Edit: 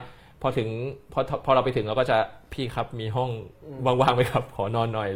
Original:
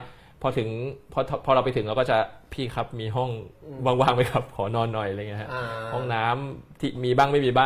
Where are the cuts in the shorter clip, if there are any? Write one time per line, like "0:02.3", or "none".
none